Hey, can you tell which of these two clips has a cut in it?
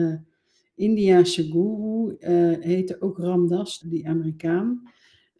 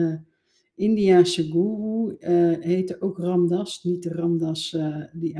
first; 1 cut; at 3.8 s

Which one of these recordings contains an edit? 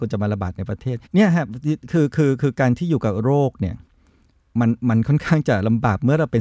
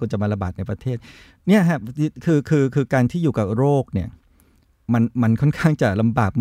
first; 1 cut; at 1.0 s

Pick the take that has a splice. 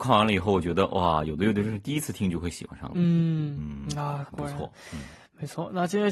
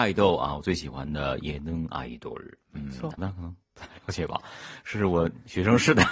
second; 1 cut; at 3.2 s

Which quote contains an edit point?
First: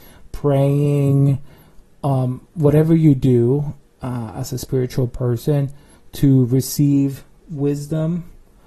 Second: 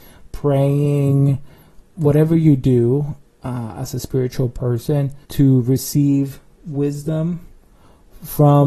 second; 2 cuts; at 1.9 s, 5.2 s

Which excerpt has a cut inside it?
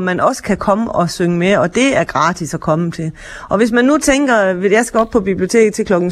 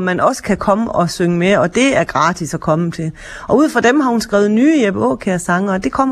second; 1 cut; at 3.5 s

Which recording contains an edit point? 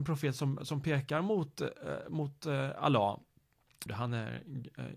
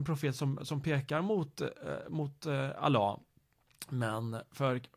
first; 1 cut; at 3.9 s

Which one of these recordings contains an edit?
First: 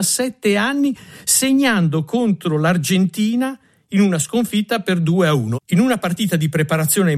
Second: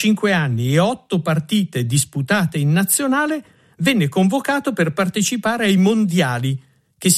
first; 1 cut; at 5.5 s

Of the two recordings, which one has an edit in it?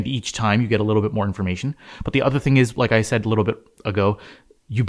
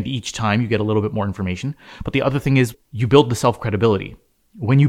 second; 1 cut; at 2.7 s

